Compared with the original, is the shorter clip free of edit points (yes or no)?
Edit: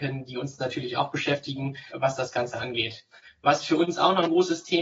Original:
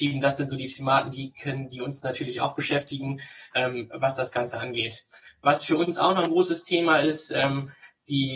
no